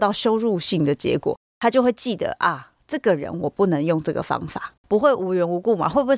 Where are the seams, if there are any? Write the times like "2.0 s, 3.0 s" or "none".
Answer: 4.8 s